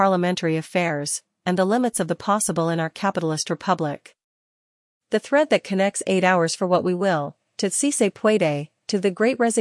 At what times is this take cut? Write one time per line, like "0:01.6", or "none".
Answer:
none